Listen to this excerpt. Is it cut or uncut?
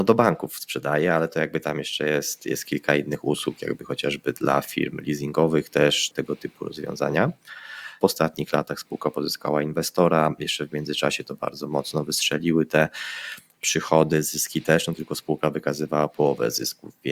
cut